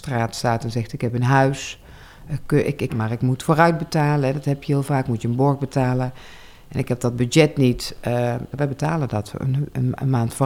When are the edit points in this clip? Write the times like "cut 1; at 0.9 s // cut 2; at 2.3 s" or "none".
cut 1; at 2.9 s // cut 2; at 8.5 s